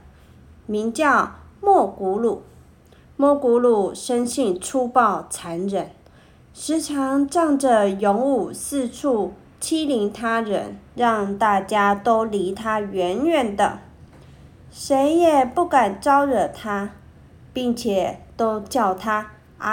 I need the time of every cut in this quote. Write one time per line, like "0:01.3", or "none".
0:10.9